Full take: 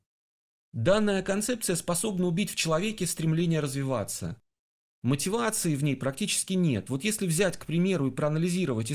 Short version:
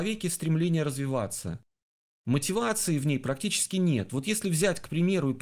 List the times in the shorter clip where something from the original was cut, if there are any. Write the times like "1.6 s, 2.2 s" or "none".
none